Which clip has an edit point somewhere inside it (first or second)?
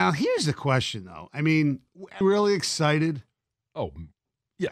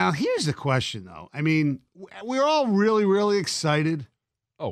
first